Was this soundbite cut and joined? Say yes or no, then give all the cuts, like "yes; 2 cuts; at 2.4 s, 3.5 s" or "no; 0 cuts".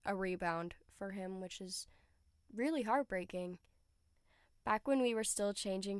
no; 0 cuts